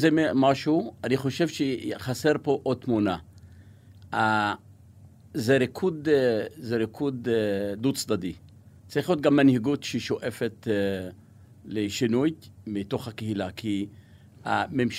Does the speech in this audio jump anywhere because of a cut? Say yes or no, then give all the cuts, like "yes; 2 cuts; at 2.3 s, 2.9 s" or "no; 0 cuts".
no; 0 cuts